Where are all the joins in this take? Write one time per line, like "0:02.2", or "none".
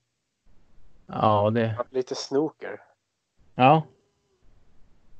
0:01.9